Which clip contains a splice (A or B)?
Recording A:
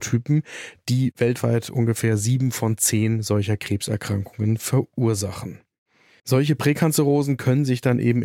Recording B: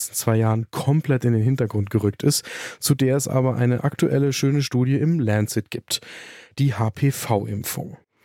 A